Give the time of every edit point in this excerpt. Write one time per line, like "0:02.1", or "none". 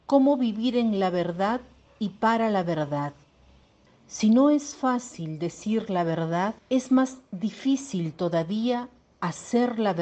0:03.9
0:06.6